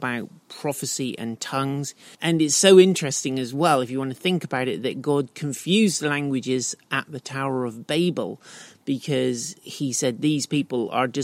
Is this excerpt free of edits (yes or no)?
no